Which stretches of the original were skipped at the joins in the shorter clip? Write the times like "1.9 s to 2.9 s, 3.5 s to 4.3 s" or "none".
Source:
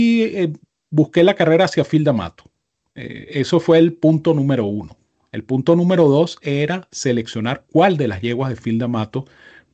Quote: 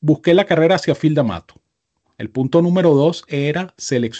2.9 s to 5.2 s